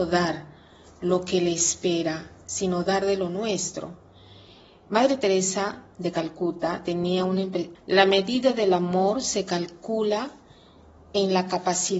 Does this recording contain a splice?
yes; 1 cut; at 7.7 s

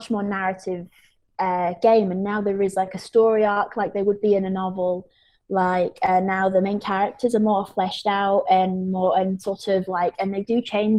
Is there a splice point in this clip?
no; 0 cuts

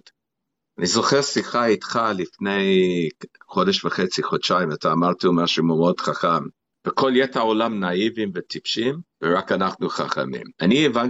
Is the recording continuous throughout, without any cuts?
no; 2 cuts; at 6.7 s, 9.1 s

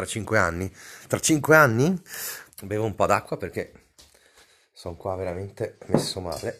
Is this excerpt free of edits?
no; 1 cut; at 2.5 s

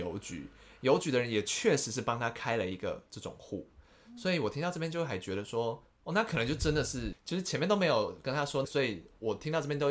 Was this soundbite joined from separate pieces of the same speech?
yes; 2 cuts; at 7.1 s, 8.6 s

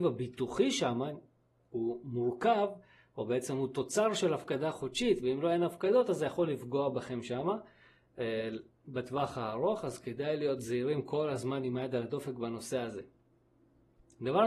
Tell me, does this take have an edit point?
no; 0 cuts

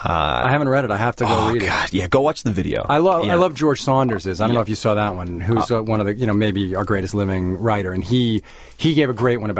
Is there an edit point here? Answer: no; 0 cuts

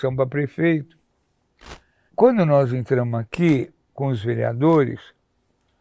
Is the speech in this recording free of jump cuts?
no; 2 cuts; at 2.1 s, 3.8 s

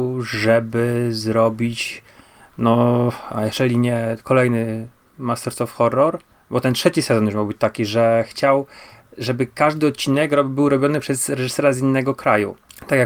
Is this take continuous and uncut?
yes; 0 cuts

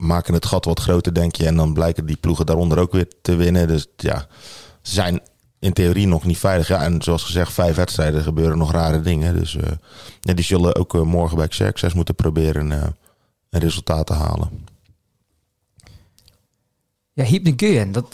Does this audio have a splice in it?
no; 0 cuts

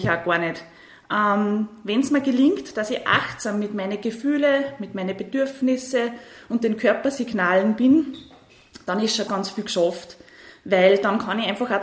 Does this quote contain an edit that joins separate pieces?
yes; 1 cut; at 9.3 s

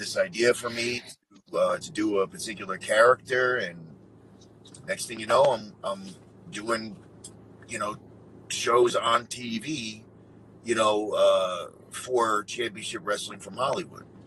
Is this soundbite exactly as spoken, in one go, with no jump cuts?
yes; 0 cuts

